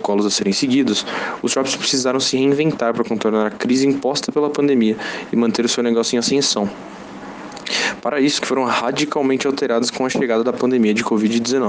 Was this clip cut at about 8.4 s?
yes; 1 cut; at 8.4 s

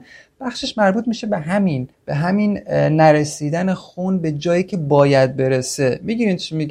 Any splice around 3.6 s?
no; 1 cut; at 1.9 s

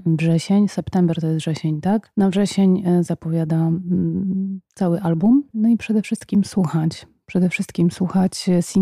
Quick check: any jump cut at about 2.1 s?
no; 1 cut; at 5.5 s

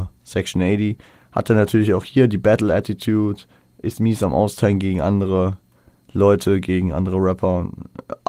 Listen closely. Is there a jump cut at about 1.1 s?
no; 0 cuts

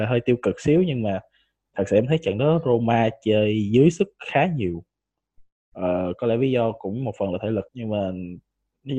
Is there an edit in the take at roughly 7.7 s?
yes; 1 cut; at 7.7 s

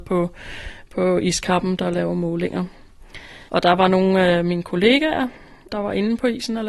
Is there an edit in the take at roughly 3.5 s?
yes; 2 cuts; at 3.5 s, 5.7 s

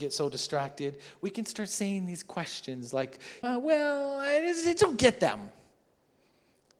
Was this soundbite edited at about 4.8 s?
yes; 2 cuts; at 3.4 s, 4.8 s

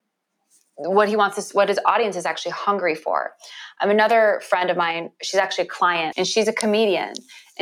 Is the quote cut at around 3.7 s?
no; 1 cut; at 6.1 s

